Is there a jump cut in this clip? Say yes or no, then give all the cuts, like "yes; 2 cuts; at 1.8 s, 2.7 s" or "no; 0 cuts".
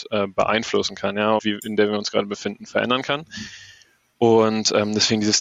yes; 1 cut; at 1.4 s